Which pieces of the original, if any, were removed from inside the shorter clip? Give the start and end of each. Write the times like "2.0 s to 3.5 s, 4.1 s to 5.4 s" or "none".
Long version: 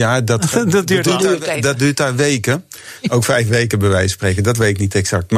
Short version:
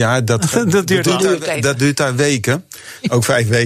none